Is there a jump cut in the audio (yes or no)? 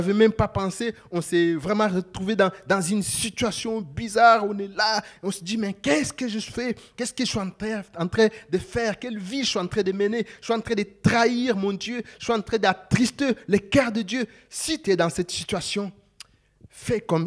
no